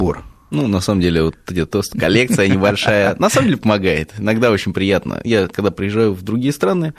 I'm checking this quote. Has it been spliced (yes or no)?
yes